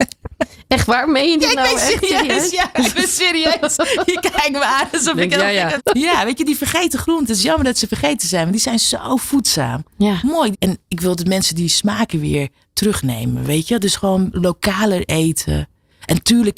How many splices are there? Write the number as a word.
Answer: two